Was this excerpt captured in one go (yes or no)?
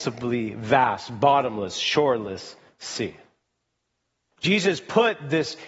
no